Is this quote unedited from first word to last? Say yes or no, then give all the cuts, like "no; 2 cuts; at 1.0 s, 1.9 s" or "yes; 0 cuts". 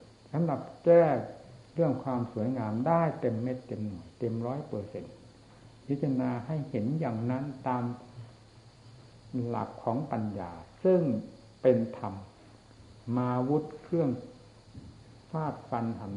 yes; 0 cuts